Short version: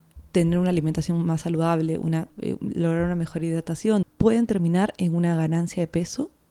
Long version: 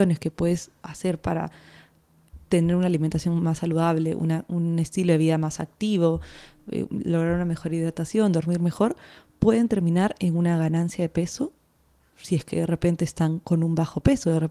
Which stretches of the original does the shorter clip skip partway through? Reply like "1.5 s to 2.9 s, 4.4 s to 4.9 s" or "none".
4.5 s to 6.6 s, 8.3 s to 9.2 s

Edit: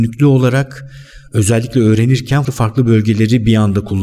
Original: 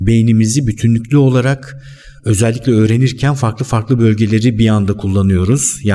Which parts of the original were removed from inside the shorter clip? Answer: 3.4 s to 3.6 s

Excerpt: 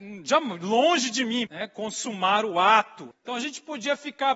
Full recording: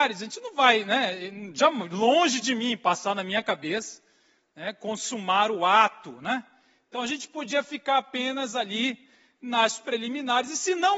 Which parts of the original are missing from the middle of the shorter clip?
2.8 s to 4.5 s, 6.2 s to 6.8 s

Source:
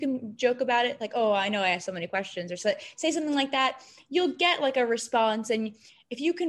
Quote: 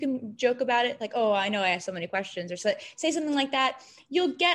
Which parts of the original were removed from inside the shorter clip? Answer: none

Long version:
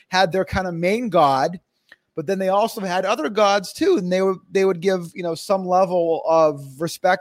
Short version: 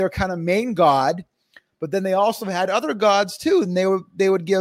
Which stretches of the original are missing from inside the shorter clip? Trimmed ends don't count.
none

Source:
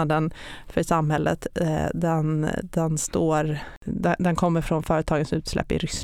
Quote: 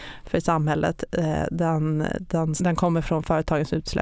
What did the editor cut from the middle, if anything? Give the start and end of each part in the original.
3.0 s to 4.2 s

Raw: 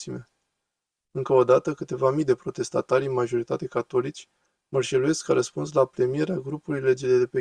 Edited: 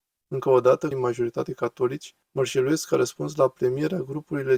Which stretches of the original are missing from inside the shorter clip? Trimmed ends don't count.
1.7 s to 3.0 s, 4.4 s to 4.6 s

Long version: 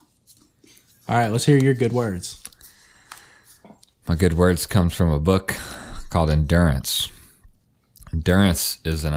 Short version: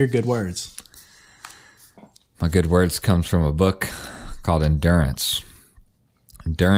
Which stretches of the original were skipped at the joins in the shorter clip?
none

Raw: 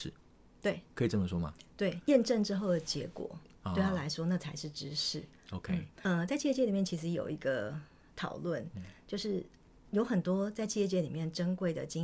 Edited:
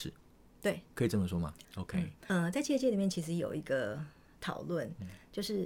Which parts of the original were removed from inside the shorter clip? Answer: 1.6 s to 5.4 s

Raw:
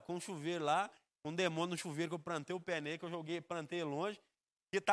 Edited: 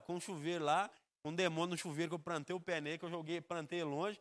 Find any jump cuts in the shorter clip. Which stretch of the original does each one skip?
none

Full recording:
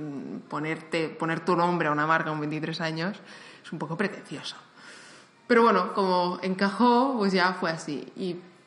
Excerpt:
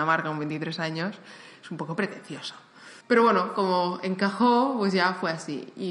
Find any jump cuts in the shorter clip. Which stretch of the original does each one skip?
5.0 s to 5.4 s

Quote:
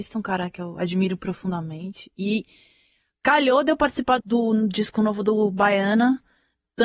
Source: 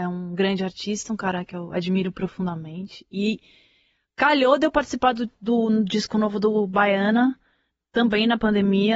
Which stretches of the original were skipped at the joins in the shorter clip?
5.1 s to 5.4 s

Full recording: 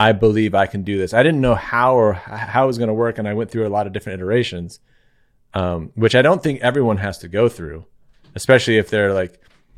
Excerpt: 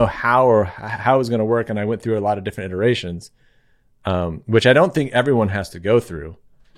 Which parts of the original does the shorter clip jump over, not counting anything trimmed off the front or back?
none

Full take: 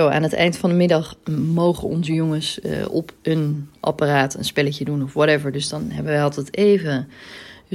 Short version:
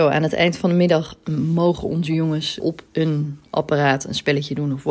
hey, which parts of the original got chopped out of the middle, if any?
2.6 s to 2.9 s

